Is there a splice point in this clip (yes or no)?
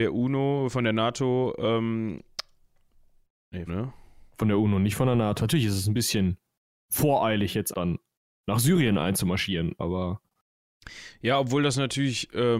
yes